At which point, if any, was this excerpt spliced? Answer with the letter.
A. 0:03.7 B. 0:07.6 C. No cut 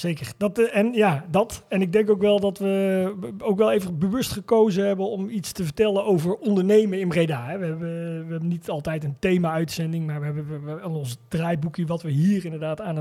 C